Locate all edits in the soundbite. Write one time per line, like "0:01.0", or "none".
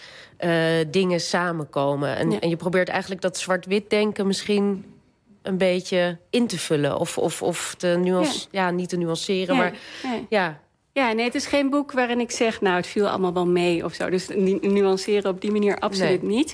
none